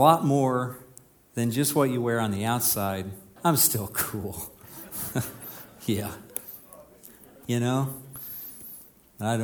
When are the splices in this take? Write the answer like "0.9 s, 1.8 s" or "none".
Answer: 3.4 s, 7.4 s